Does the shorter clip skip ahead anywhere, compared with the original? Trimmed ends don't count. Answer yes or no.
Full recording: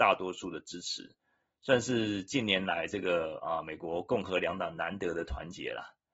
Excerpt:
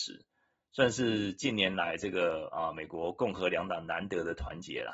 no